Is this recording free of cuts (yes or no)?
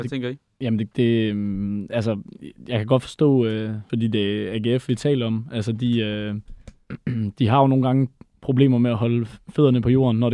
no